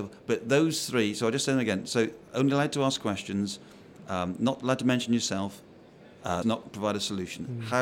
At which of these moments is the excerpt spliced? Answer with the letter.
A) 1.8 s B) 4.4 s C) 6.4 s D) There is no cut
C